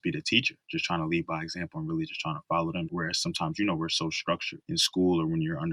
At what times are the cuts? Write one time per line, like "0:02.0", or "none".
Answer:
0:02.9
0:04.6